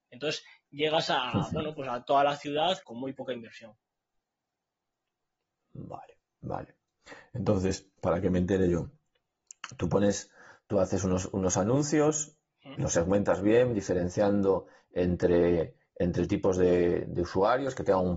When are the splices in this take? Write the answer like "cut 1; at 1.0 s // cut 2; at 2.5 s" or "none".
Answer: cut 1; at 2.8 s // cut 2; at 8.0 s